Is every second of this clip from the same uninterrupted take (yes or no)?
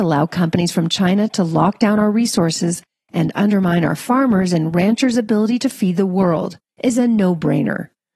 no